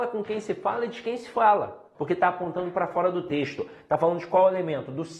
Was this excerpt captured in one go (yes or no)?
no